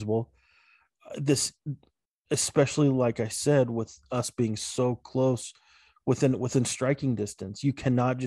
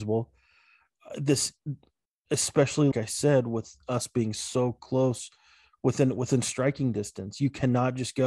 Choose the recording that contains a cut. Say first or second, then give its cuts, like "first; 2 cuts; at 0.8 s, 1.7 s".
second; 1 cut; at 2.9 s